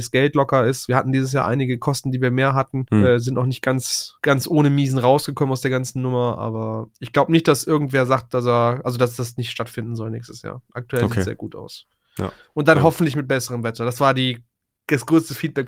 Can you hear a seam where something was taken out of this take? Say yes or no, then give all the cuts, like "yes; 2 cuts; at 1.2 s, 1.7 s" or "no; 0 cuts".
no; 0 cuts